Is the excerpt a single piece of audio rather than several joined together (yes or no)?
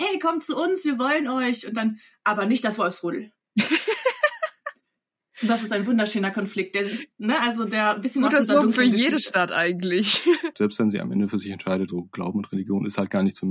no